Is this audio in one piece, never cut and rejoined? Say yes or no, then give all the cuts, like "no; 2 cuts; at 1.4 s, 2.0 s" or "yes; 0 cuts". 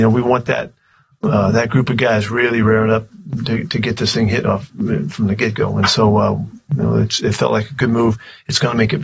yes; 0 cuts